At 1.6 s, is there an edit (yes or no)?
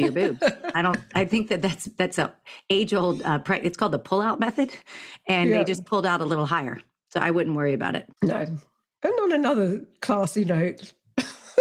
no